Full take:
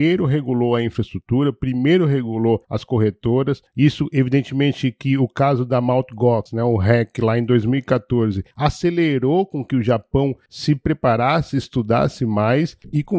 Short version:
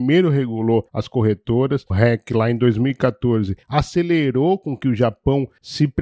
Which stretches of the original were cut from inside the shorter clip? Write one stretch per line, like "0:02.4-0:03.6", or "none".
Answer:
0:03.7-0:06.8

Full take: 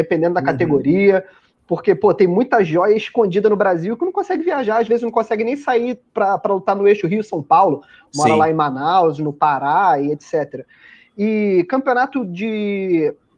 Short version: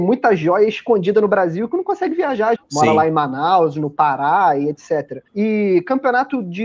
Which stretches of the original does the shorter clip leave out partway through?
0:04.8-0:08.0
0:10.7-0:11.1

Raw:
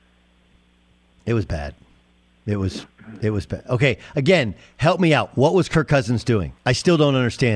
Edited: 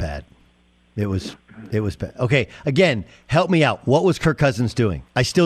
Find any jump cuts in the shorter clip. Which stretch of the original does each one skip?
none

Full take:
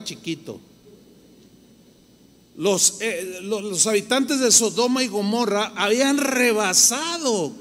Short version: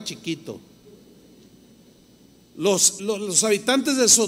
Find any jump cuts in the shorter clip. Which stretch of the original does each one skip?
0:03.0-0:03.4

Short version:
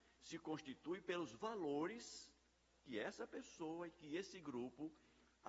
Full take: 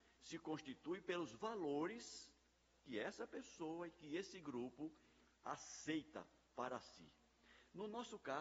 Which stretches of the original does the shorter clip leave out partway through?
none

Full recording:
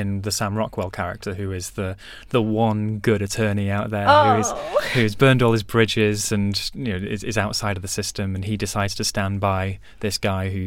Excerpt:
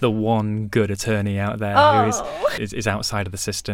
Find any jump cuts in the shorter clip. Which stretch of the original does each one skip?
0:04.9-0:07.1

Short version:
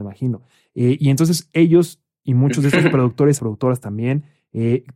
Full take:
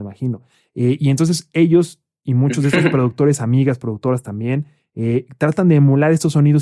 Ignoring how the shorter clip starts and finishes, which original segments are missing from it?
0:03.4-0:03.8

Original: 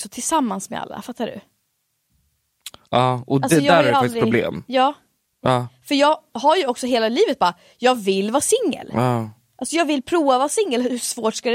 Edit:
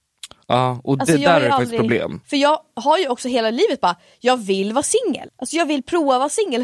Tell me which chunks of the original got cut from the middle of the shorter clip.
0:04.7-0:05.8
0:08.9-0:09.5

